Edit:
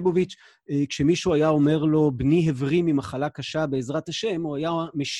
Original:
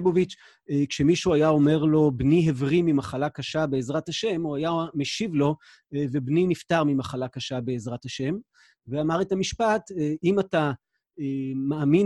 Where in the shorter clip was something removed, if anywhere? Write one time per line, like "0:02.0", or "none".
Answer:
none